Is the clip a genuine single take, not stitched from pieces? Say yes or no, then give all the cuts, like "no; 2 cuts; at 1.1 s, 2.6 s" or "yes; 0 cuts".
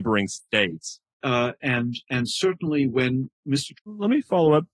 no; 2 cuts; at 1.2 s, 3.7 s